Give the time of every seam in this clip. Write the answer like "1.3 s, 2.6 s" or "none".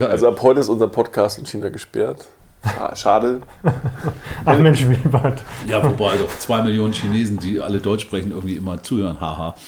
none